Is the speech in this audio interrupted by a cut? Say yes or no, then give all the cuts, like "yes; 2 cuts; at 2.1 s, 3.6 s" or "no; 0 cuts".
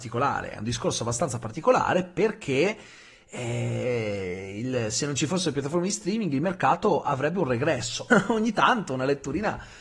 yes; 1 cut; at 8.1 s